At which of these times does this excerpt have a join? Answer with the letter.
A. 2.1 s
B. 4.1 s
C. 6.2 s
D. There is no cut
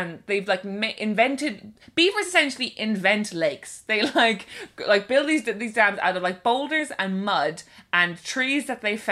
D